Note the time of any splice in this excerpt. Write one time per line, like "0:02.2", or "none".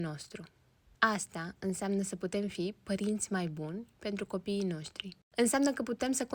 none